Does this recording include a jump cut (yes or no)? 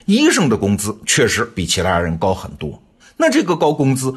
yes